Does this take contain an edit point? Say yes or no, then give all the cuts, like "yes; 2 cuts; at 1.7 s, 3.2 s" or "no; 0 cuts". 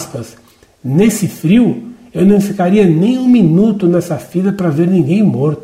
no; 0 cuts